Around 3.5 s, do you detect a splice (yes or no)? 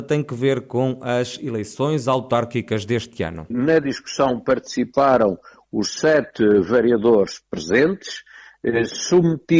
yes